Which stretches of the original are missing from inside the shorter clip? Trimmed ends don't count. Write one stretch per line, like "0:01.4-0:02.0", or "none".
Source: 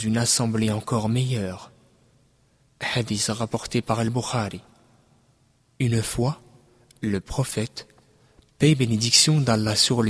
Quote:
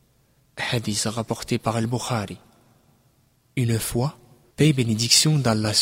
0:06.7-0:08.5